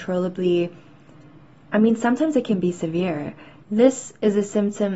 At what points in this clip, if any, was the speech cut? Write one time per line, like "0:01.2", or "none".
0:03.6